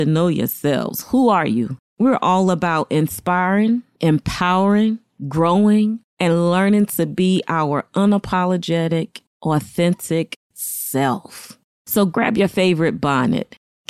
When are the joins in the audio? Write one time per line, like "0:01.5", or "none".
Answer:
0:01.8